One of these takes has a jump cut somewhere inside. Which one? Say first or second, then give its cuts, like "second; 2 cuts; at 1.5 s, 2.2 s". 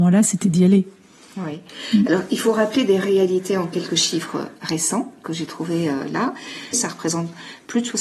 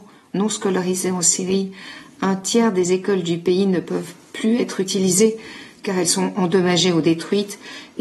first; 1 cut; at 6.7 s